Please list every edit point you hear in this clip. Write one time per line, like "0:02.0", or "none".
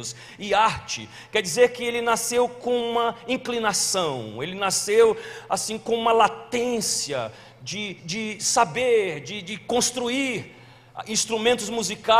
0:08.0